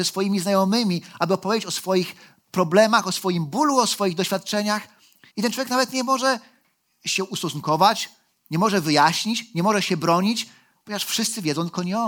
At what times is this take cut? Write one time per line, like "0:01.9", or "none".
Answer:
0:05.3